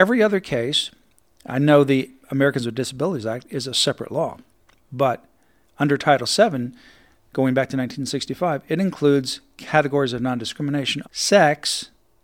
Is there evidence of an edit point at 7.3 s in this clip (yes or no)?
no